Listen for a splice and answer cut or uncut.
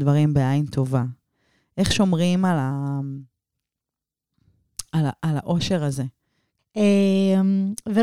cut